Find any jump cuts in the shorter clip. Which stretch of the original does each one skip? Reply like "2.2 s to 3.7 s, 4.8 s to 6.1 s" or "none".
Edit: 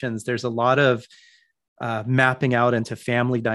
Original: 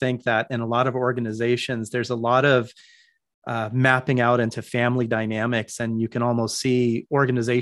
none